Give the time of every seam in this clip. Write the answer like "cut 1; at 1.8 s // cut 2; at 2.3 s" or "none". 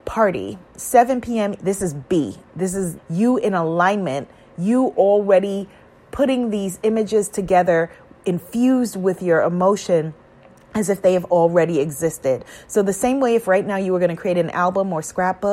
cut 1; at 1.6 s // cut 2; at 3.0 s